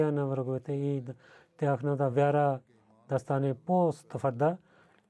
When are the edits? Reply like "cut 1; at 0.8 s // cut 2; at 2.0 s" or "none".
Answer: none